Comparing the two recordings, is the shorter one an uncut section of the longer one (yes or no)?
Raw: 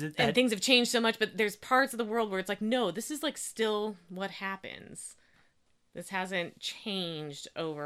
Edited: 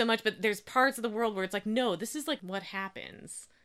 no